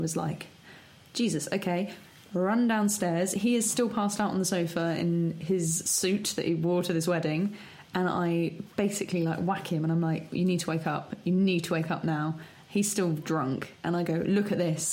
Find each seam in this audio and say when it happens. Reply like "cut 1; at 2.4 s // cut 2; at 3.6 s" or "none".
none